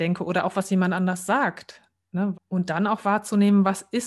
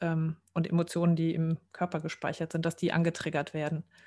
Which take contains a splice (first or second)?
first